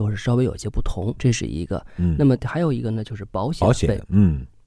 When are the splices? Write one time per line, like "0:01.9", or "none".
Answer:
0:01.2